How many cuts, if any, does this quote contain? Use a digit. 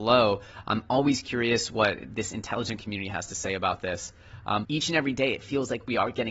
1